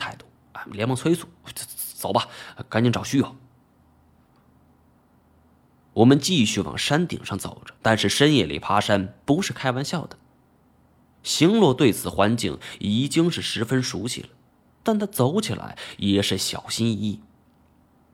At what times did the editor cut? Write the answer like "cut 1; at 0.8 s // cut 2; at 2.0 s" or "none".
cut 1; at 7.8 s